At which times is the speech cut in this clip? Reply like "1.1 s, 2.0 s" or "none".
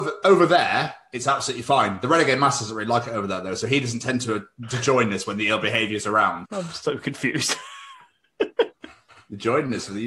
6.4 s